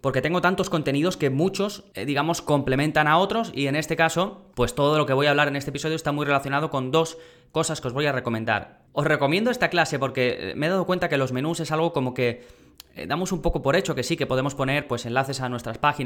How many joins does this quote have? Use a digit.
1